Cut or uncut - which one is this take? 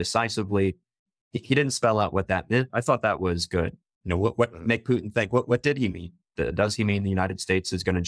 cut